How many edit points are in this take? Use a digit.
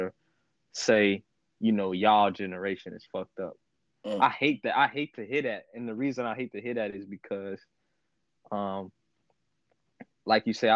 0